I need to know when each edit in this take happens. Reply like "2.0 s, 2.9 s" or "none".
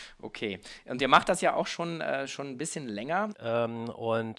3.3 s